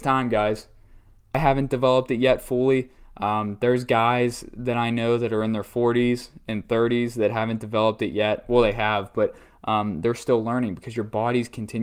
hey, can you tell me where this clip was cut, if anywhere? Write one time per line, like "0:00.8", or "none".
none